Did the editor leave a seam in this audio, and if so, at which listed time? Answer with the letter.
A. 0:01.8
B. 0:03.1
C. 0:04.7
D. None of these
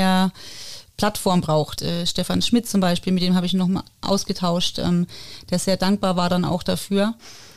A